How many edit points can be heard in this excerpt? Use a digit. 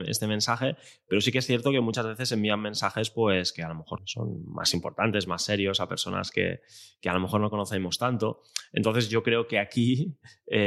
1